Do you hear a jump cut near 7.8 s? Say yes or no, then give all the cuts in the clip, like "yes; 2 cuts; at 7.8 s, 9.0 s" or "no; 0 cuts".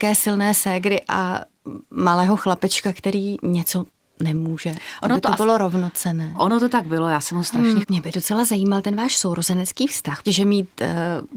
yes; 2 cuts; at 7.8 s, 10.3 s